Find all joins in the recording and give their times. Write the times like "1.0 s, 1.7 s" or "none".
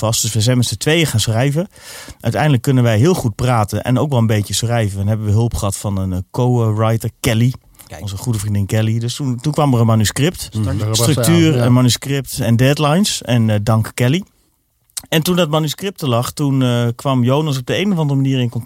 10.8 s

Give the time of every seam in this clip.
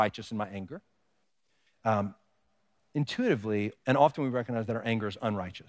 1.7 s, 3.8 s

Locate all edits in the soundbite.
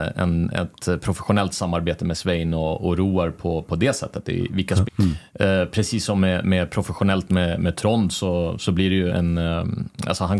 4.9 s, 9.1 s

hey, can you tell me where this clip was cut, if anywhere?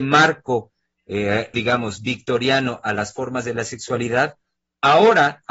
1.5 s

